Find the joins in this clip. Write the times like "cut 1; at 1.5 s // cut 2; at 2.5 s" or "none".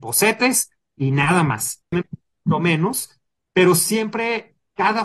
cut 1; at 1.9 s